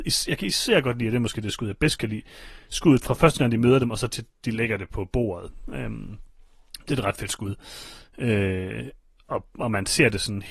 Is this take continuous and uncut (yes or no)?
yes